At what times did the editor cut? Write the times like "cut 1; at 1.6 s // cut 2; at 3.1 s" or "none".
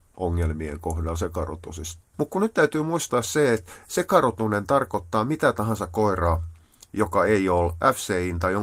cut 1; at 2.1 s